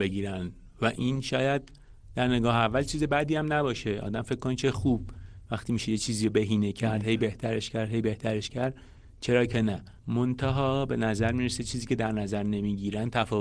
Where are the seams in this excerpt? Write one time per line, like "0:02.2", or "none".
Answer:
0:10.0